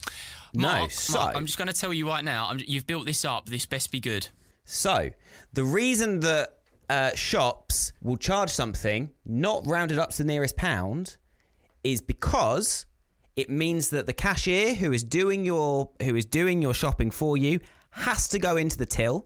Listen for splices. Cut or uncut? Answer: cut